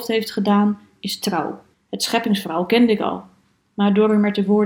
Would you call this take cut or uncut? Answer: cut